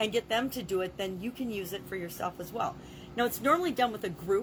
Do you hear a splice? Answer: no; 0 cuts

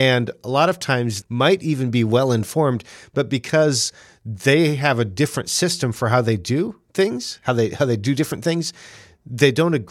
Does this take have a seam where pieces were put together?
yes; 1 cut; at 1.2 s

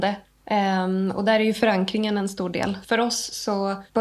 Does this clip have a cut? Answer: no; 0 cuts

